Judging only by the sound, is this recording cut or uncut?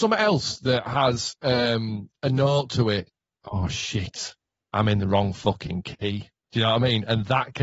cut